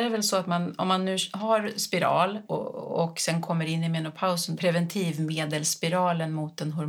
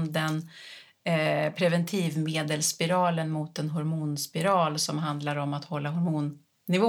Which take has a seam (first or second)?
first